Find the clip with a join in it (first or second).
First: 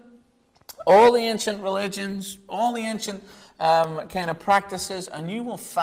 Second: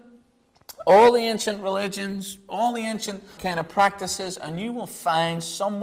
second